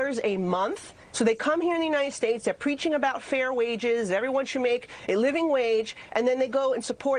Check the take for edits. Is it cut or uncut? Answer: cut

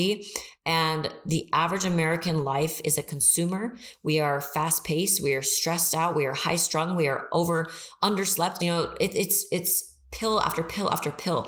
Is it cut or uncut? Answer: cut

